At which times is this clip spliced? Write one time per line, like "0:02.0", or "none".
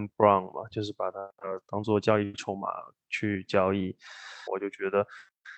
0:04.5